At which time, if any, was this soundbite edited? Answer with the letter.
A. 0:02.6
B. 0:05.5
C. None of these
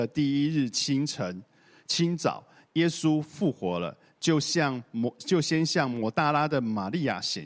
C